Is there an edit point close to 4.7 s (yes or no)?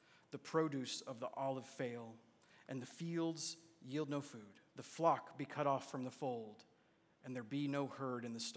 yes